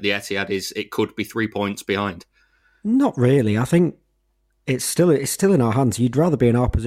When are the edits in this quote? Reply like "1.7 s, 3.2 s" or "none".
none

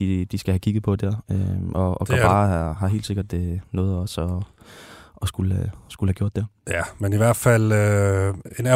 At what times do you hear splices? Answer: none

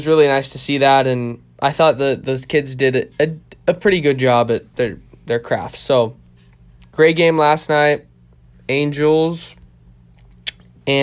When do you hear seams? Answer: 4.7 s

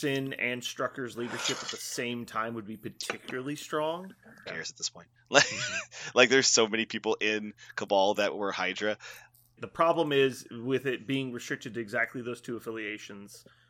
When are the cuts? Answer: 4.5 s, 9.6 s

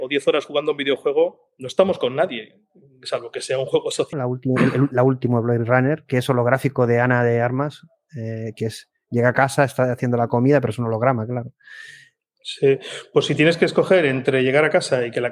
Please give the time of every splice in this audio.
4.1 s

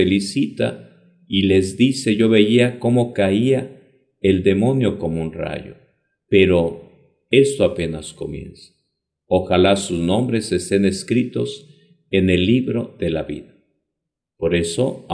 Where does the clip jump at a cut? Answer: none

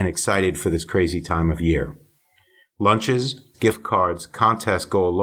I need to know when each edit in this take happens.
3.5 s

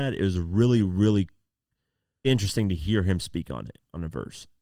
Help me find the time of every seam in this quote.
2.2 s

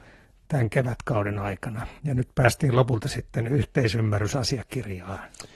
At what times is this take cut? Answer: 2.0 s

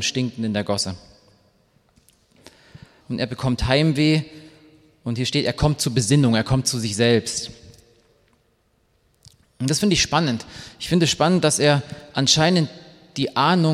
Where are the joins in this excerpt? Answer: 3.0 s

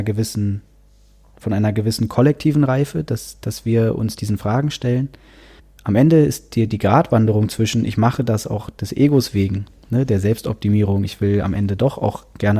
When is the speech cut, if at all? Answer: none

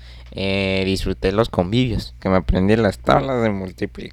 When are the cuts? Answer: 2.2 s

